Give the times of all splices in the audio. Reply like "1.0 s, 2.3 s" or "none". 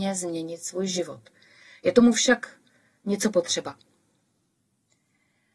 none